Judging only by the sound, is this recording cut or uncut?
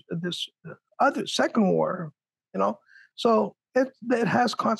uncut